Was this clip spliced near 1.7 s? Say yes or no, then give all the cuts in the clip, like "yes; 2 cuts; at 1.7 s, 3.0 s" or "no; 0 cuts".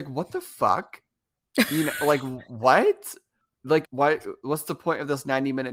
no; 1 cut; at 3.8 s